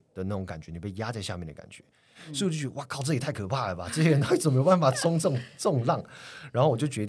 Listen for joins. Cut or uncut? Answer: uncut